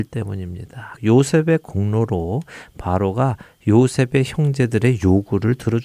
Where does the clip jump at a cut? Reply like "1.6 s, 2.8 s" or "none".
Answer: 1.0 s